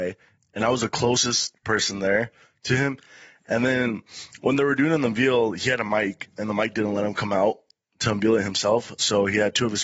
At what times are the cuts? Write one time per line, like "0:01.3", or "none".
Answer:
none